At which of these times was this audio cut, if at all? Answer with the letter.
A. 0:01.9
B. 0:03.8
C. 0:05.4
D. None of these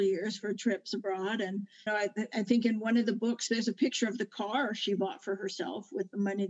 A